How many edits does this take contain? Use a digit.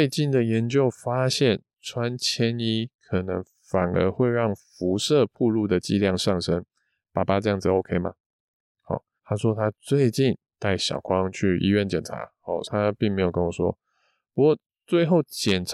2